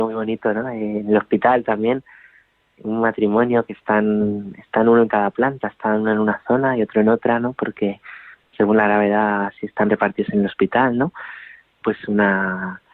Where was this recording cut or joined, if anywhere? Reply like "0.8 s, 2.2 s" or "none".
11.8 s